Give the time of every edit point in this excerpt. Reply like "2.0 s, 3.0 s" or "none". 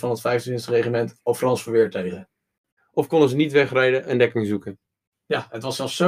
2.8 s

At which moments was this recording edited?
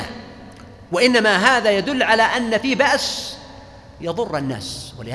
none

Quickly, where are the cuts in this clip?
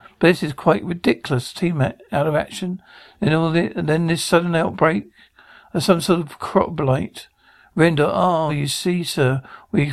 8.5 s

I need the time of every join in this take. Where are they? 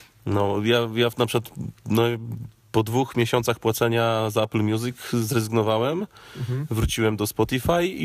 none

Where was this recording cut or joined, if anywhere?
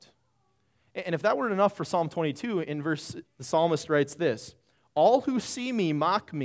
3.2 s

